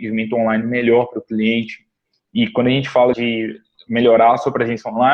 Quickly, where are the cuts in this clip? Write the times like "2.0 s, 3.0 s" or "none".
3.1 s